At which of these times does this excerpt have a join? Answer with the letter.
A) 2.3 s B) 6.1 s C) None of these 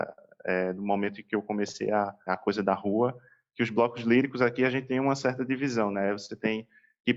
A